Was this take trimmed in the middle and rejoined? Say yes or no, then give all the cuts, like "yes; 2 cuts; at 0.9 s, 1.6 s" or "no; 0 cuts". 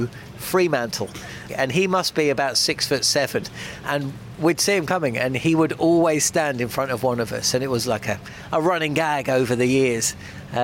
yes; 2 cuts; at 1.5 s, 3.8 s